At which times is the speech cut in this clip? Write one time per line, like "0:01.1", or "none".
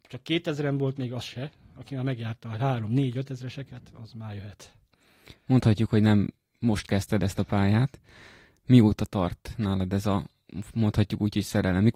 0:04.0

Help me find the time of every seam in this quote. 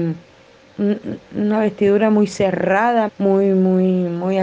0:03.1

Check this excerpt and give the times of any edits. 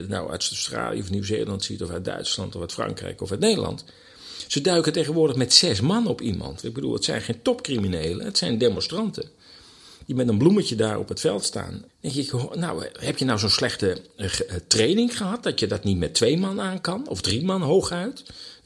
0:06.6
0:11.9

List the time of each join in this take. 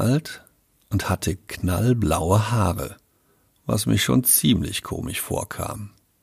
none

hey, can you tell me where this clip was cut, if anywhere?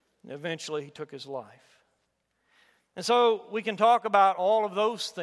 none

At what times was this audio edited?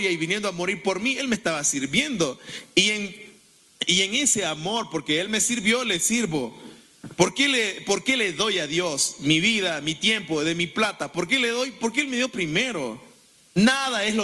none

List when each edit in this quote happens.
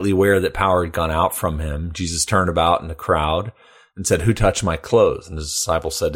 none

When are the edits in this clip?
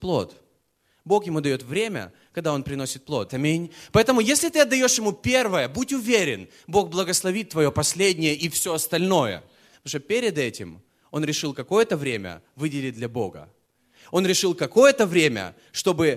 0:03.3
0:09.7

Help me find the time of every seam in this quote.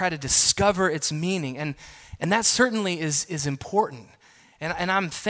none

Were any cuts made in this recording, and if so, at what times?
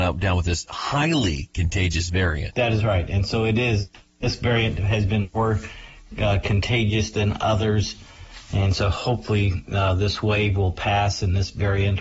none

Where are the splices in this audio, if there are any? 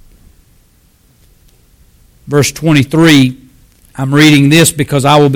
none

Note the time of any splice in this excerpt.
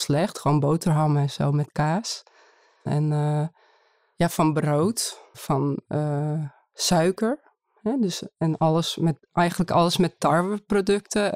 0:02.9
0:05.3

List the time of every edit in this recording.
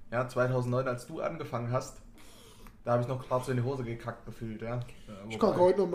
0:02.8

